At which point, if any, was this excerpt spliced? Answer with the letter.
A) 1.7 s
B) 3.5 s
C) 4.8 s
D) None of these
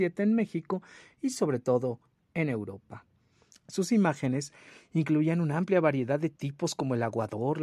B